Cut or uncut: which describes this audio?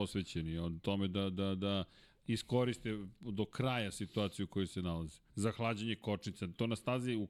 cut